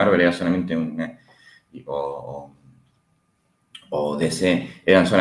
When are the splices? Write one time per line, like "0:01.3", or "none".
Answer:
none